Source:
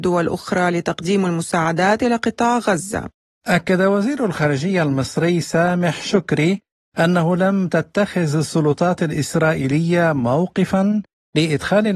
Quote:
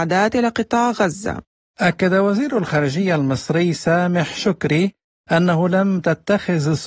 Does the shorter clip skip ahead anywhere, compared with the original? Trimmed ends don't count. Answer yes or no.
no